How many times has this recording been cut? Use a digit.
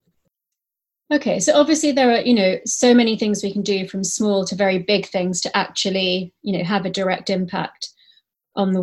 0